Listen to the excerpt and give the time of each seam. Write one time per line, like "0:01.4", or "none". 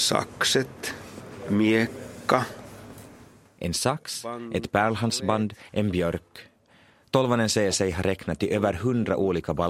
0:05.7